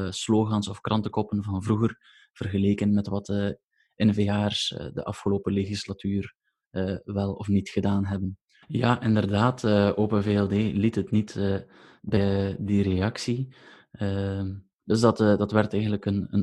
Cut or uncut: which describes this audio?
cut